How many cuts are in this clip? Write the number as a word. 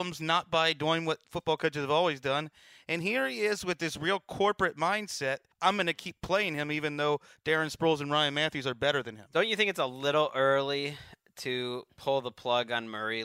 one